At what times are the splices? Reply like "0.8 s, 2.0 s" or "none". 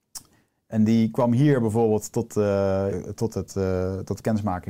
2.9 s